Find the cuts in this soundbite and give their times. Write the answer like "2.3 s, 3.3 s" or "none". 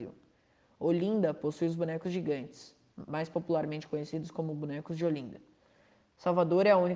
none